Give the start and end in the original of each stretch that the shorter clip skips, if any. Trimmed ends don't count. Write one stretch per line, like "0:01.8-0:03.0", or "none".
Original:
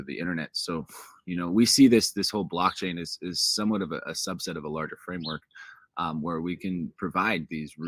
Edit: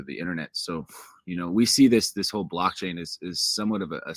none

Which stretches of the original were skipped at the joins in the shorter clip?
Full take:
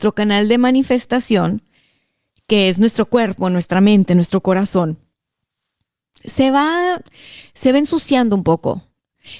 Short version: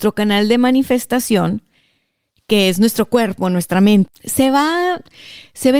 0:04.1-0:06.1

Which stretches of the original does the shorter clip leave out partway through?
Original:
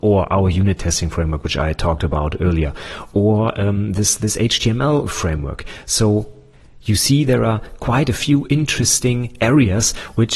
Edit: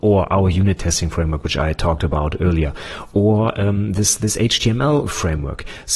none

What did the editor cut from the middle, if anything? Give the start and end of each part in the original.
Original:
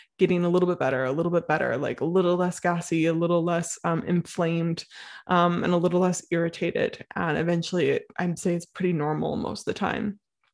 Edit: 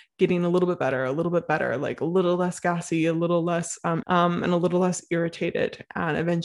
0:04.0-0:05.2

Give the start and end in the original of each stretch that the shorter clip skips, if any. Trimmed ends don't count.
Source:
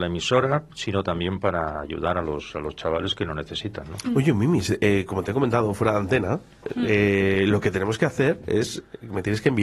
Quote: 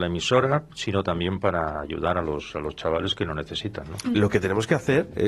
0:04.1-0:07.5

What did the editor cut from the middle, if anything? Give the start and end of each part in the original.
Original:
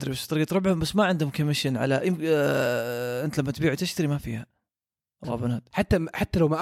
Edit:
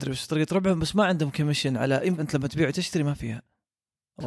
0:02.2-0:03.2

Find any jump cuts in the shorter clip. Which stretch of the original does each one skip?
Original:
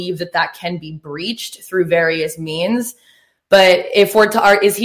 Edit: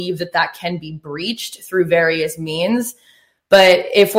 none

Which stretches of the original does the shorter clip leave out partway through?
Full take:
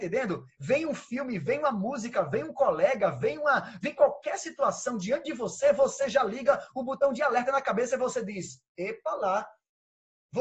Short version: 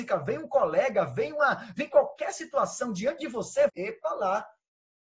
0:05.7-0:08.7

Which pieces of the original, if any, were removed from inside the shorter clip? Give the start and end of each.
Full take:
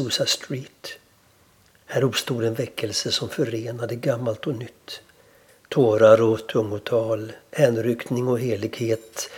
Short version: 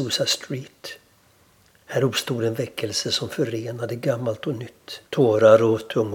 0:05.1-0:05.6

